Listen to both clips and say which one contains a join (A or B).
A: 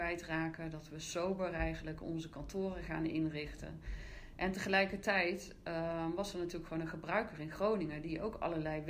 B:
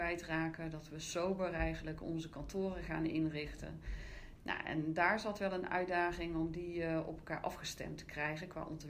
B